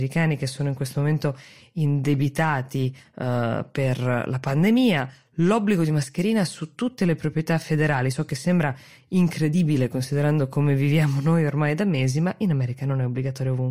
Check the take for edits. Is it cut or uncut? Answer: uncut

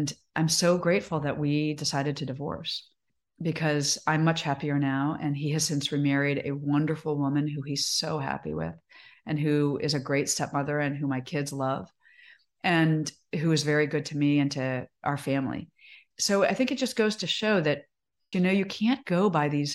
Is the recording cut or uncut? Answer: cut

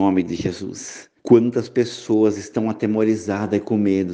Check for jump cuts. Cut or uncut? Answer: cut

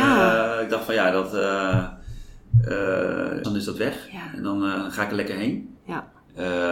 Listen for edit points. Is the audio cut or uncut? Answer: cut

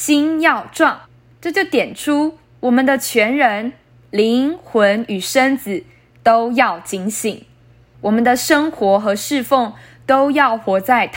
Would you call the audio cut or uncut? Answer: cut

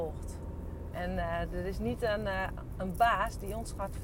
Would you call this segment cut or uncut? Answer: cut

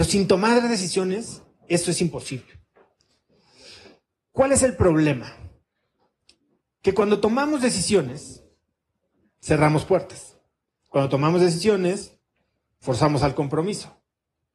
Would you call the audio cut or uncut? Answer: uncut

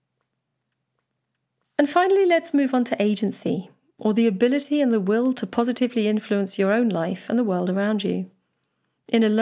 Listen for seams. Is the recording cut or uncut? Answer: uncut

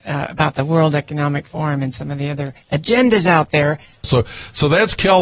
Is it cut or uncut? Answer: cut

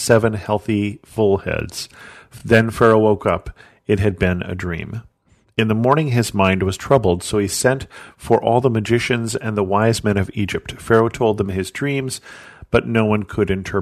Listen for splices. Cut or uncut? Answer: uncut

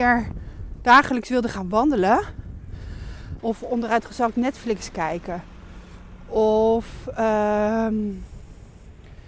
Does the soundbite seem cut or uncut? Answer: cut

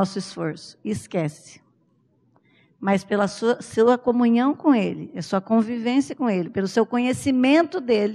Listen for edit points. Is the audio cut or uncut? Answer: uncut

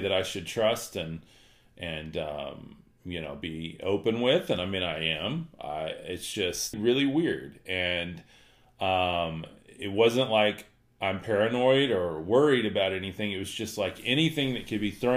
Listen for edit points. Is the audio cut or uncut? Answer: cut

